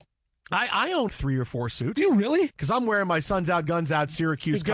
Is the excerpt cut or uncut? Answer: cut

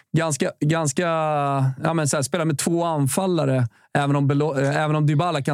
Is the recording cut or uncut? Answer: uncut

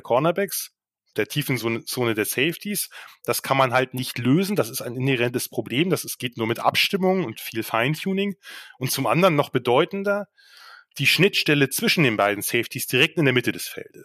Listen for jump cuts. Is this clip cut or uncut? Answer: uncut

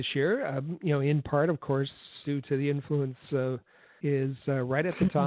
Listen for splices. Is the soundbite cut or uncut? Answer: cut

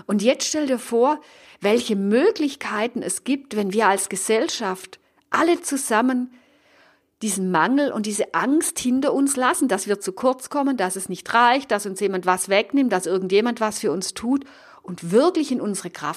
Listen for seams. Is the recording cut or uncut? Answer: uncut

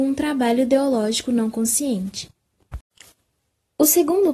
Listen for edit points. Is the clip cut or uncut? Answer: uncut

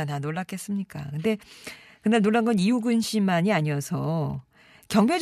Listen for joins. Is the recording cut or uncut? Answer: uncut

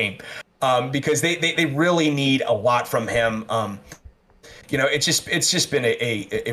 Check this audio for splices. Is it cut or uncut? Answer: uncut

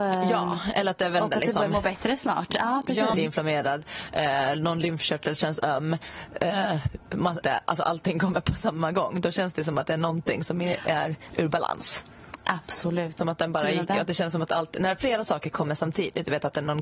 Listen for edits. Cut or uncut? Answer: cut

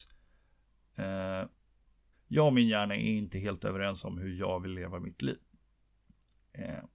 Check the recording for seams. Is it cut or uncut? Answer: cut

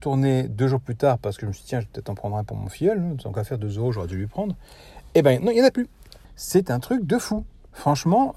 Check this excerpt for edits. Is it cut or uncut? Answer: cut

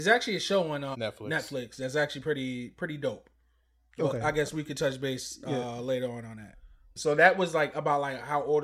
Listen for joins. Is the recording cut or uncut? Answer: cut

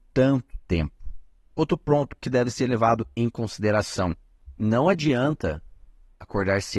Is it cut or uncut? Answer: cut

